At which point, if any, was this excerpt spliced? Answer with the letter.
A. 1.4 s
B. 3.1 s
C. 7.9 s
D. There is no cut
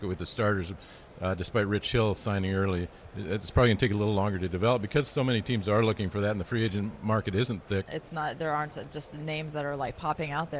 C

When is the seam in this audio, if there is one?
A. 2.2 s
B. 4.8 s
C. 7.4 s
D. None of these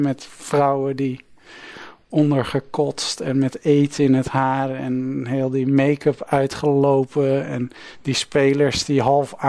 D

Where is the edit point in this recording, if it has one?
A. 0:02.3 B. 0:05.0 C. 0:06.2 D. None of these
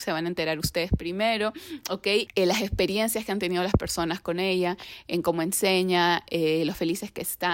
A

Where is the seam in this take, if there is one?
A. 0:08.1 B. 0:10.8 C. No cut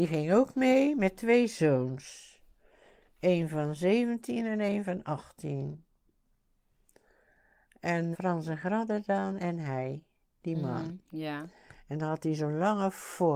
A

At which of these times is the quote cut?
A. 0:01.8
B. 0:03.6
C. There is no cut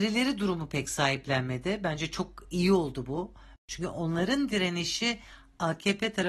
B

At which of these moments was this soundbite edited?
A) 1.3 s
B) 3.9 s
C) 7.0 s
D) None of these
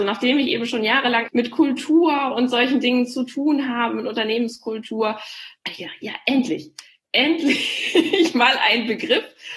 A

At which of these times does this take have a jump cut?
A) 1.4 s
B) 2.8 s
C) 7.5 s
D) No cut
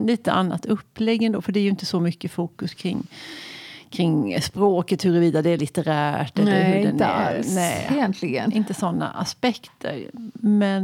D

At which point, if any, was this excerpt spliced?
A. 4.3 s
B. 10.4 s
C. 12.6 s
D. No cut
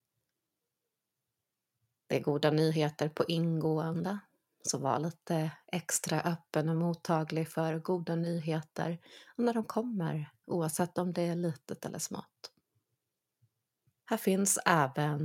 B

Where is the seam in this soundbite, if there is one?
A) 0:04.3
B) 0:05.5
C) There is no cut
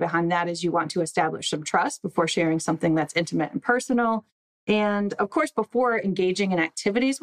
C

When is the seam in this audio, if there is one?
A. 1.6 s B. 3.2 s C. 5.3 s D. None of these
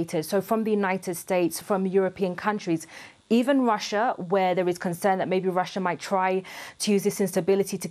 A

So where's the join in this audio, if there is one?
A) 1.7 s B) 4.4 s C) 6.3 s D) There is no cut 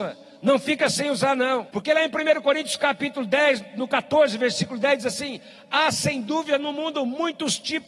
A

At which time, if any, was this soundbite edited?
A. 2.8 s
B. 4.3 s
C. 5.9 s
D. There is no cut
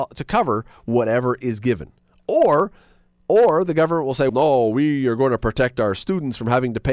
B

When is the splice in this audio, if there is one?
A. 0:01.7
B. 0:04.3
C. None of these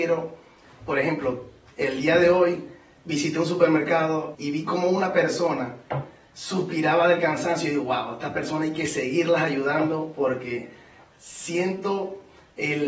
B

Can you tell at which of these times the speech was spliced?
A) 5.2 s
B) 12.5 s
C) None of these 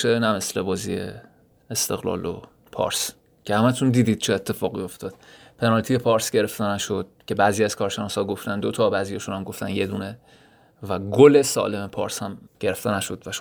B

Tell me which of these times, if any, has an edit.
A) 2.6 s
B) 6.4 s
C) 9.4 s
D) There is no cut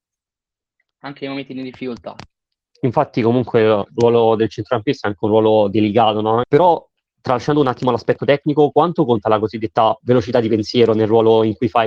B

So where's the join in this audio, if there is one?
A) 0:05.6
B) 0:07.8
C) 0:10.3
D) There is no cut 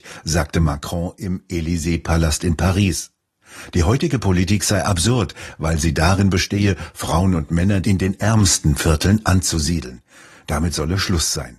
B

